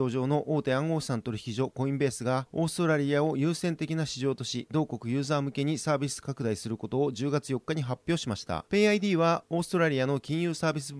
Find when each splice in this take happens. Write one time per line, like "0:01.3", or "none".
0:08.7

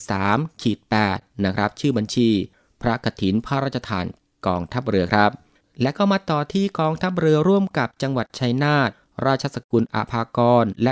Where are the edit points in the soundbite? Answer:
none

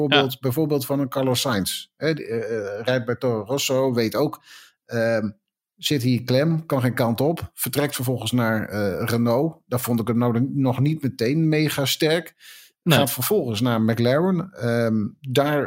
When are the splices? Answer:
none

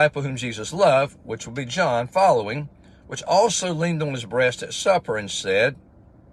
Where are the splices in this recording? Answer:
none

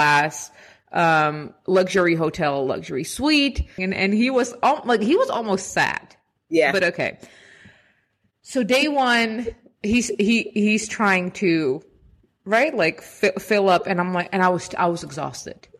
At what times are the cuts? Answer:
0:03.8

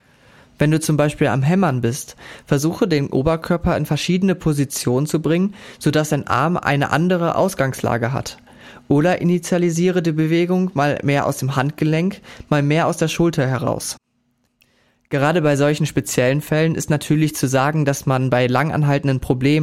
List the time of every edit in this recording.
none

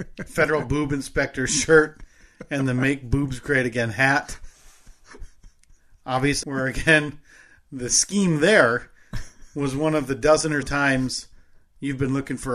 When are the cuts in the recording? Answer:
0:06.4
0:10.6

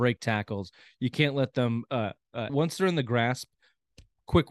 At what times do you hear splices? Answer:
0:02.5

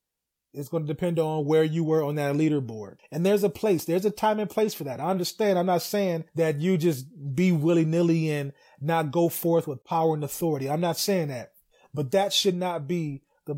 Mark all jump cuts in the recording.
0:03.0

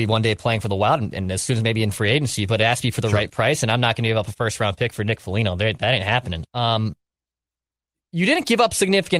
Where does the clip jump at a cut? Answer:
0:06.5

